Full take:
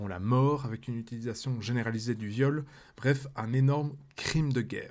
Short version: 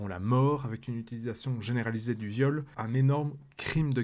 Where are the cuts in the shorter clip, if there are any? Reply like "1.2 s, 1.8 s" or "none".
2.7 s